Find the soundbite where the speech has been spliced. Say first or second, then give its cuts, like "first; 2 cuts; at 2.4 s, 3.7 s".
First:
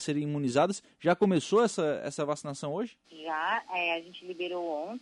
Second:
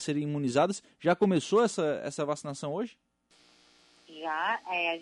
first; 1 cut; at 3.0 s